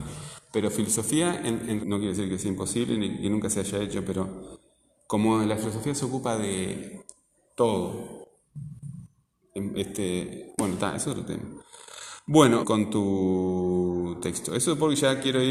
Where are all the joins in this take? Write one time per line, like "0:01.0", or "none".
0:01.8
0:12.6